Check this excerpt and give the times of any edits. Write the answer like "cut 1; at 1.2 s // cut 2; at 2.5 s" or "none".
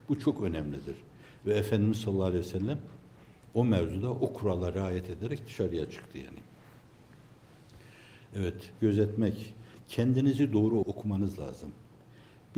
cut 1; at 8.8 s